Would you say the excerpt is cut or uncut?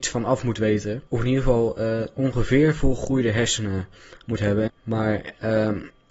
cut